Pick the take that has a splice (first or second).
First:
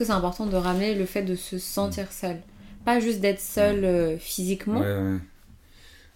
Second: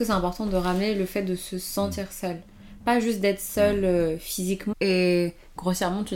second